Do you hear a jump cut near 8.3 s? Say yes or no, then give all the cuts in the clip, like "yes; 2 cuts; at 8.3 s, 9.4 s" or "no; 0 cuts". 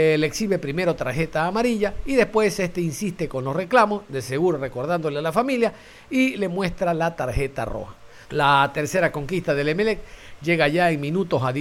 yes; 1 cut; at 8.3 s